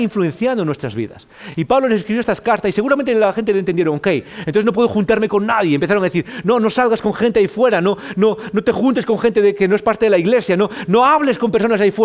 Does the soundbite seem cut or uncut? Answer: uncut